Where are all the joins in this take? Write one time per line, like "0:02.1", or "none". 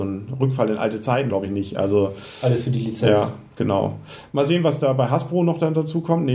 0:01.3